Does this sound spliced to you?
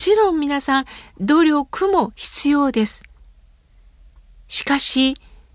no; 0 cuts

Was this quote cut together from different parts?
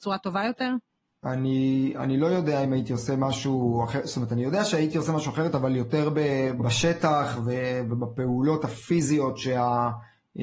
yes; 2 cuts; at 1.1 s, 6.6 s

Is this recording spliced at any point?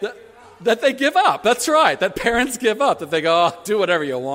no; 0 cuts

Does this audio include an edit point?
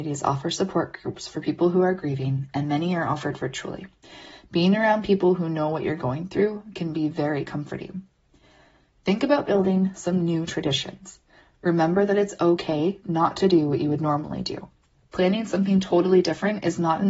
no; 0 cuts

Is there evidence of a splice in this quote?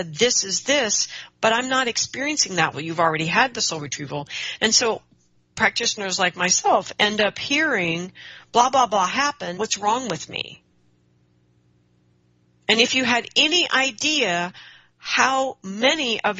yes; 3 cuts; at 2.7 s, 4.6 s, 9.6 s

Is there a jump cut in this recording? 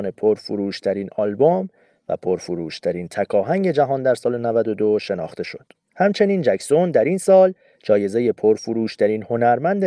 no; 0 cuts

